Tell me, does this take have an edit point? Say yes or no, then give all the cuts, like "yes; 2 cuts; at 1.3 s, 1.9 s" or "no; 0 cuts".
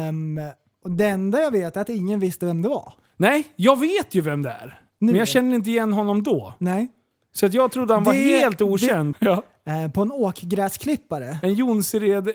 yes; 1 cut; at 9.1 s